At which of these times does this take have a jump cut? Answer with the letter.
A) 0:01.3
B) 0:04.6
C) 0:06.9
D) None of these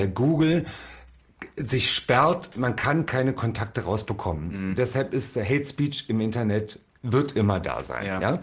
C